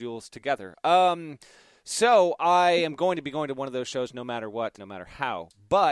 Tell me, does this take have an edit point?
yes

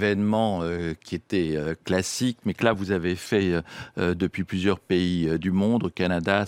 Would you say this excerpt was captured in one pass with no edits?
yes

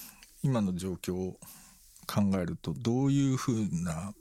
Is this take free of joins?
no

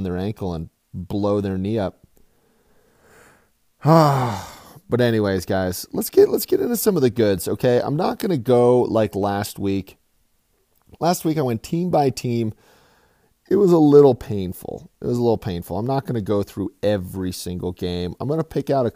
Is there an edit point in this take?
no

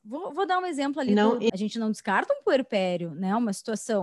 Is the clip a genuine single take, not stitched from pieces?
no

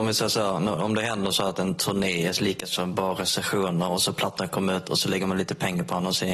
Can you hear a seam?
no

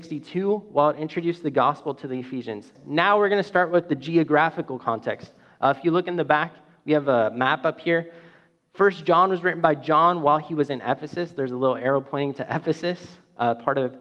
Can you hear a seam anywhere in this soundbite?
yes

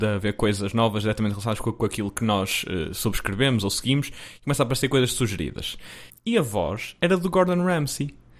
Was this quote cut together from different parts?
yes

